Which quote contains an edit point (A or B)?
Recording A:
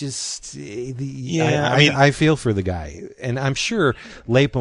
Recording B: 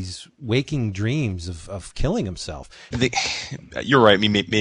B